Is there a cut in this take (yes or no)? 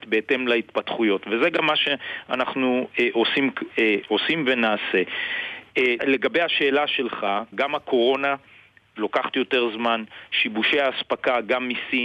yes